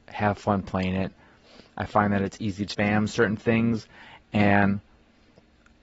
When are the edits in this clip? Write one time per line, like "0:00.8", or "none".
0:02.7